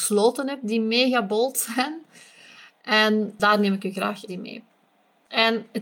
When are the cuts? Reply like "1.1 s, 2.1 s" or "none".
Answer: 4.3 s